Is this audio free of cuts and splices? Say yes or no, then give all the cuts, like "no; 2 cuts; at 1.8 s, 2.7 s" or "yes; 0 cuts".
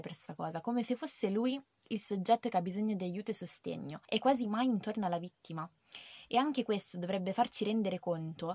yes; 0 cuts